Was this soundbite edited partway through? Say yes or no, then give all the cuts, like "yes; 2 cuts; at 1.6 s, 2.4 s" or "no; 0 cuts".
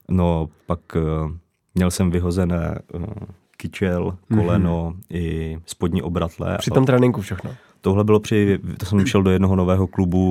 no; 0 cuts